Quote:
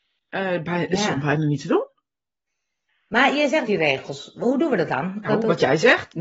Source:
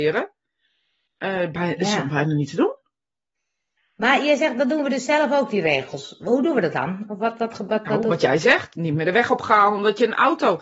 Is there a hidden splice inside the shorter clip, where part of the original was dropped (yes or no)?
yes